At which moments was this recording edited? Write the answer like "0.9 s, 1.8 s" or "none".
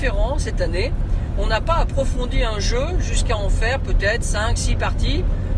none